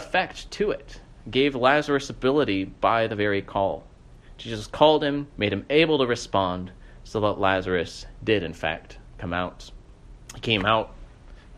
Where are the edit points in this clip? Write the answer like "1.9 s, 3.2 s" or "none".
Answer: 5.3 s, 10.2 s